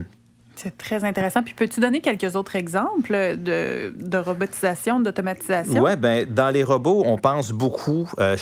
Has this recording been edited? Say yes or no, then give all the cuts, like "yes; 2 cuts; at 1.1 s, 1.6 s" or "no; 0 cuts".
no; 0 cuts